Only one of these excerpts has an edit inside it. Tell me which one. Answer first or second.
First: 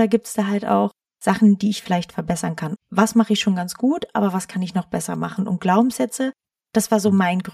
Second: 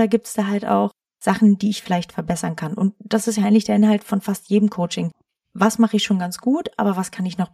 first